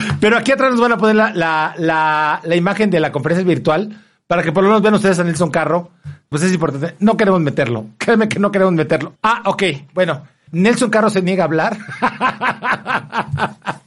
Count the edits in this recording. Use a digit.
3